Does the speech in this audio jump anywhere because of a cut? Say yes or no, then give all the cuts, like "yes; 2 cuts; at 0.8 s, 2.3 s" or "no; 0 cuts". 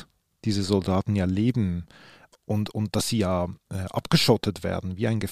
no; 0 cuts